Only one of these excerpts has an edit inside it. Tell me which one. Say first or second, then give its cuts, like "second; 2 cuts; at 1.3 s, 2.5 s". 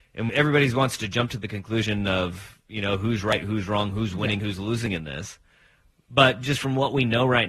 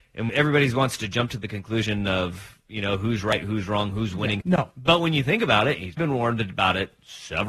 second; 2 cuts; at 4.4 s, 6.0 s